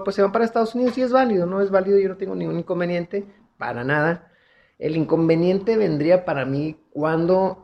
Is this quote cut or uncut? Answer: uncut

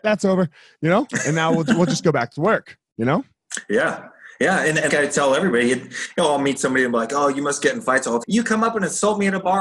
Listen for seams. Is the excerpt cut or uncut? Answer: cut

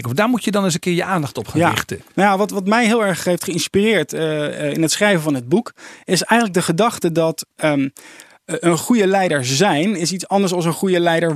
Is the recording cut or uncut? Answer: uncut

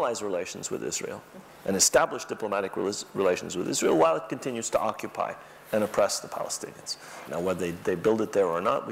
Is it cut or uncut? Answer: cut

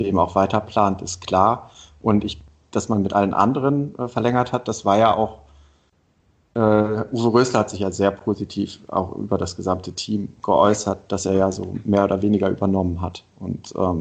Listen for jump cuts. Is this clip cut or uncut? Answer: uncut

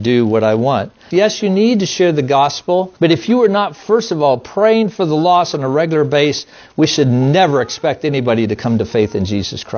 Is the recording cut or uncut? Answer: cut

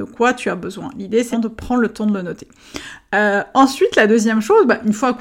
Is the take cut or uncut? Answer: cut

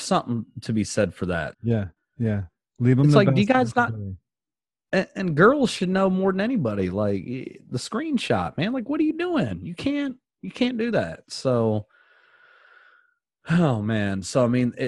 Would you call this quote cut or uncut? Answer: cut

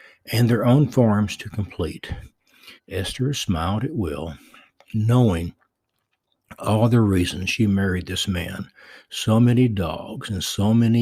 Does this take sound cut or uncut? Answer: cut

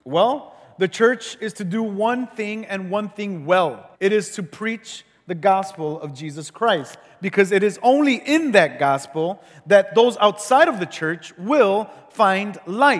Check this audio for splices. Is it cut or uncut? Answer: cut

